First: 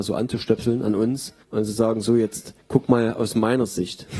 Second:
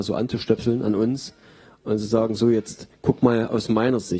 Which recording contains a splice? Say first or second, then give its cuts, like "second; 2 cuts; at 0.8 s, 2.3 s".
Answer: first; 1 cut; at 1.4 s